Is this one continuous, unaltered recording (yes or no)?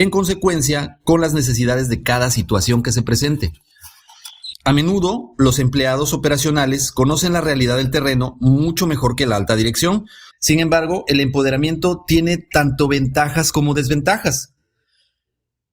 no